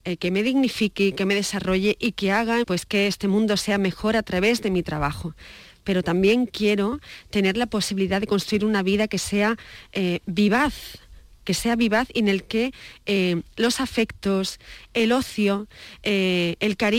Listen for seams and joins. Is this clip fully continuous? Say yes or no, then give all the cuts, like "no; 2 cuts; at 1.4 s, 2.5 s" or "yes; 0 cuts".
no; 1 cut; at 2.6 s